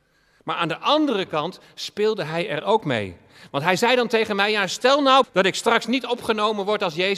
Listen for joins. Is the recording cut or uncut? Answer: cut